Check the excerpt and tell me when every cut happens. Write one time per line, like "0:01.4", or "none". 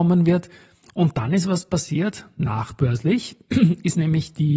none